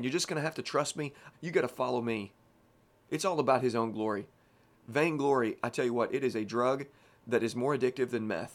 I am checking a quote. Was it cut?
yes; 1 cut; at 1.3 s

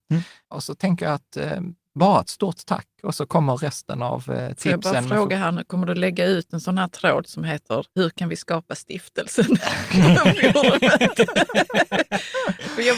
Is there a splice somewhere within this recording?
yes; 1 cut; at 7.9 s

